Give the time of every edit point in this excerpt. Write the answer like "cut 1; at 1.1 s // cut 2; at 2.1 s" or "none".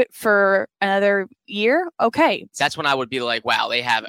cut 1; at 2.5 s